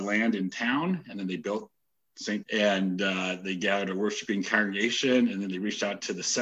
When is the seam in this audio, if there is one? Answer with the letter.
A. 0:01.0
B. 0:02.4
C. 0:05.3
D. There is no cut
B